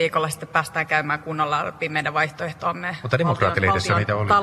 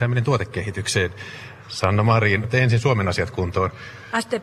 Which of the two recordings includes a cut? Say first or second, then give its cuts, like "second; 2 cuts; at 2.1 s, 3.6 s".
second; 1 cut; at 2.4 s